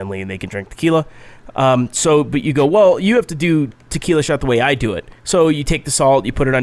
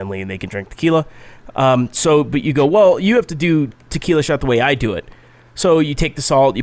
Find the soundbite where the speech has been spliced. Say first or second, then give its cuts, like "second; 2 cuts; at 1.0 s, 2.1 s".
first; 1 cut; at 5.2 s